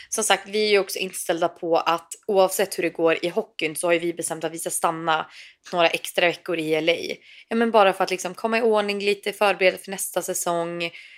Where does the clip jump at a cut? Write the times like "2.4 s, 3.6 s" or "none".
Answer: none

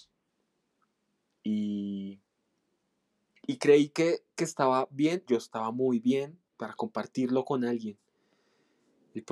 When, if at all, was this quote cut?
5.3 s, 6.5 s

